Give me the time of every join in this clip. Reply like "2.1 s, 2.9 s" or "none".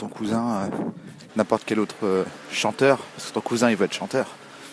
1.3 s